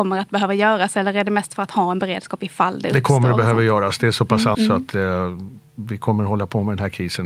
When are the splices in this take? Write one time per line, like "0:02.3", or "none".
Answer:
0:04.5